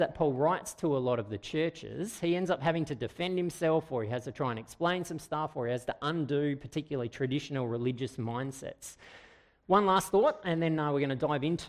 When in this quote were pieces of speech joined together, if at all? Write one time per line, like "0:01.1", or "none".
0:09.6